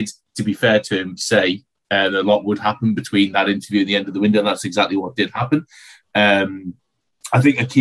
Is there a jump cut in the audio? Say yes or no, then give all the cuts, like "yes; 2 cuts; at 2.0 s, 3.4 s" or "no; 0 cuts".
no; 0 cuts